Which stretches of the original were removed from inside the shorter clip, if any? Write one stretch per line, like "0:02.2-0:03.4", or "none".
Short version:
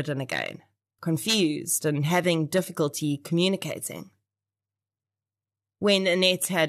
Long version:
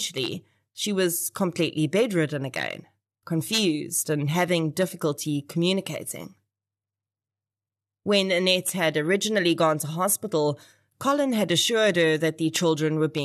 none